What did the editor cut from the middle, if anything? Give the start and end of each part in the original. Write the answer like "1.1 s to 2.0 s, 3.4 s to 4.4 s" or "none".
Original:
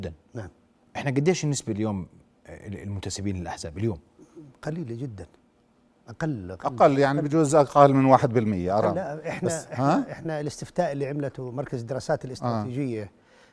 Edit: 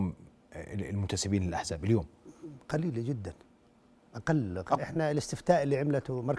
6.7 s to 10.1 s